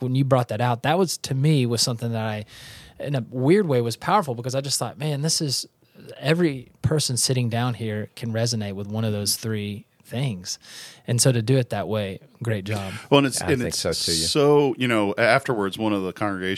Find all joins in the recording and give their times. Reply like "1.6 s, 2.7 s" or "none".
none